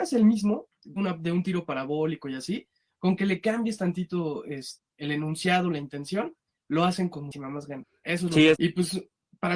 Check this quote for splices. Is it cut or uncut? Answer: cut